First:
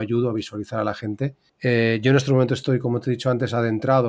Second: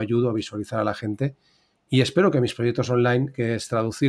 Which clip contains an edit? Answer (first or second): first